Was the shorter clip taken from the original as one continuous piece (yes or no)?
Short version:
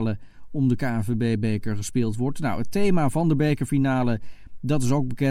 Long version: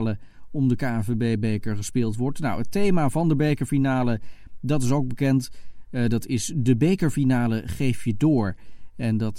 yes